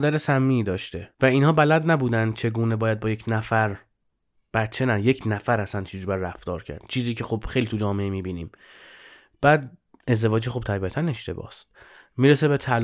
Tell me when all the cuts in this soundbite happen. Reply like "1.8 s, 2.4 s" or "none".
none